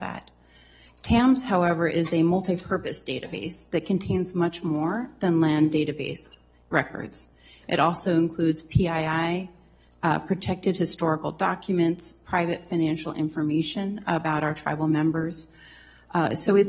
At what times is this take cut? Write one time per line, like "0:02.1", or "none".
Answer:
none